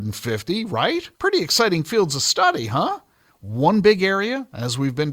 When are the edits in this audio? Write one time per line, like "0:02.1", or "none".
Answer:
0:01.1
0:03.3